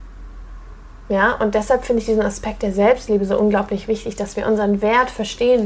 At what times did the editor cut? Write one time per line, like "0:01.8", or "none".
none